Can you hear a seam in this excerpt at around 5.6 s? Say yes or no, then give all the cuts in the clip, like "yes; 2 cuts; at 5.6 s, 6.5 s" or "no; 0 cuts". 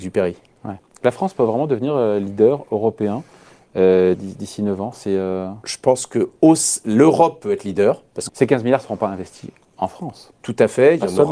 no; 2 cuts; at 4.1 s, 8.3 s